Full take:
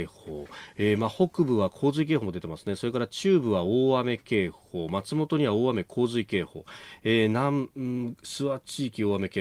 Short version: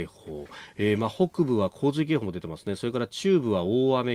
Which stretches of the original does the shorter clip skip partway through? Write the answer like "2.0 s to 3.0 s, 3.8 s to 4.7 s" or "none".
none